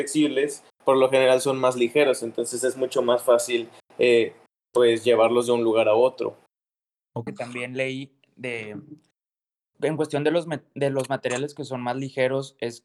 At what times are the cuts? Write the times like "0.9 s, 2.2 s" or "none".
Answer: 7.3 s